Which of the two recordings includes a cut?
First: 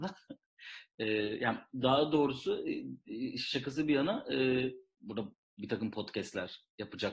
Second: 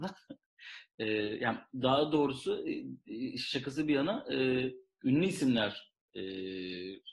first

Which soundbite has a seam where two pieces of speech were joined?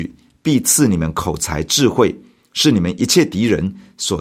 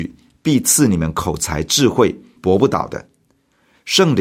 second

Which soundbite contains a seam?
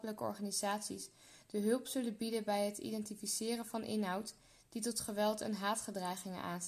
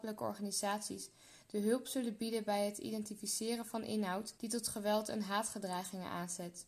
second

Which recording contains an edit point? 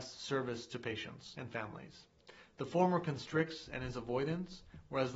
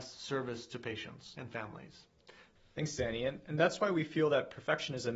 second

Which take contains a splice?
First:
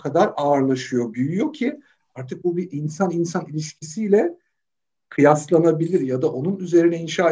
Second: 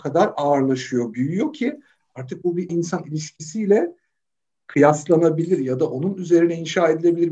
second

